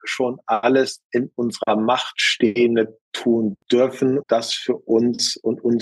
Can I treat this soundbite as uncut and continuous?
no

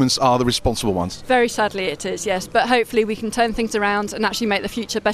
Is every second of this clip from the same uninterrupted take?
yes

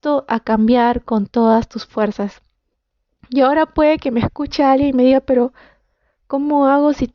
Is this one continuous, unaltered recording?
yes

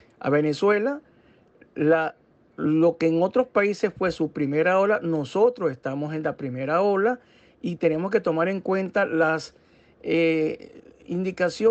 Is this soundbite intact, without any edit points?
yes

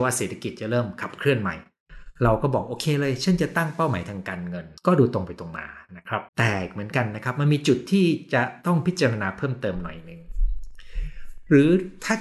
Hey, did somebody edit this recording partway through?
yes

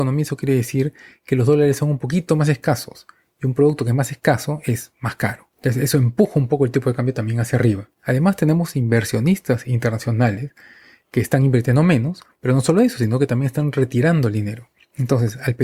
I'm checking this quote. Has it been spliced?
no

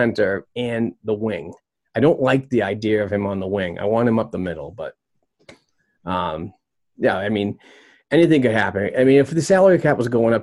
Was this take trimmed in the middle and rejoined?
no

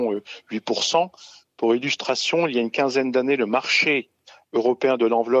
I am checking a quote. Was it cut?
no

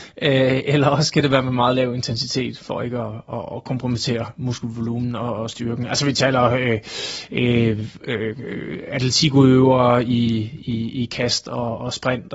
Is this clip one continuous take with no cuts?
yes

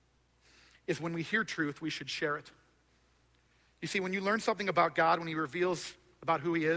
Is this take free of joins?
yes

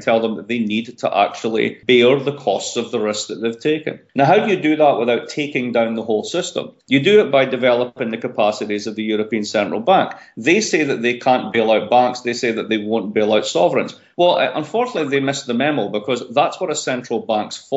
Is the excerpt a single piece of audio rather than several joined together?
yes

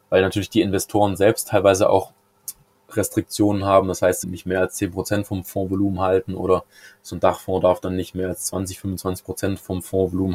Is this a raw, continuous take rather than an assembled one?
no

